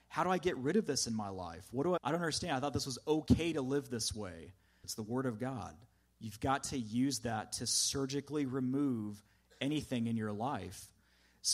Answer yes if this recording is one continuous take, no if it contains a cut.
no